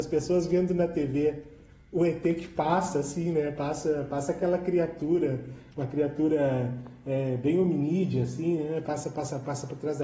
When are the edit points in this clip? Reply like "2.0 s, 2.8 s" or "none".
none